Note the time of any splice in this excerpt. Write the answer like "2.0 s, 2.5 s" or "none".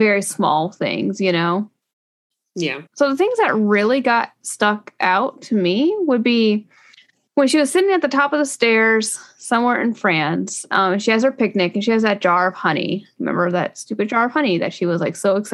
2.9 s